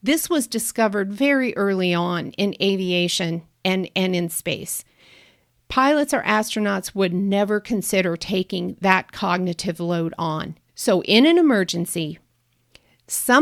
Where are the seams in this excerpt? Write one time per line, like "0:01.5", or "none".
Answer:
0:10.7